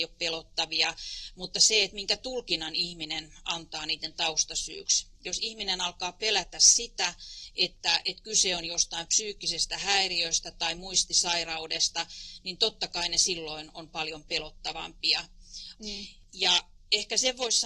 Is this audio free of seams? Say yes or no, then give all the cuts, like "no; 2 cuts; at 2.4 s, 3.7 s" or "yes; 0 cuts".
no; 1 cut; at 15.7 s